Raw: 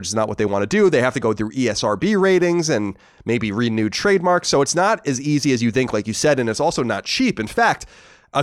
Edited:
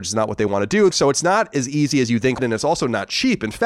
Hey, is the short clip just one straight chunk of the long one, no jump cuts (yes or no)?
no